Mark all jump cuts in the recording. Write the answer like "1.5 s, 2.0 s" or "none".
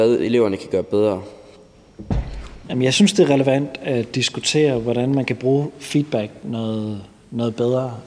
2.6 s